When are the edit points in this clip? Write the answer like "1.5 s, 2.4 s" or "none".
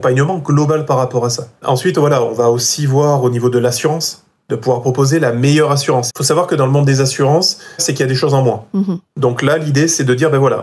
6.1 s, 7.8 s